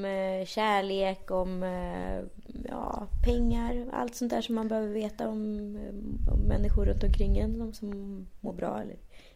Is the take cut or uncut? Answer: uncut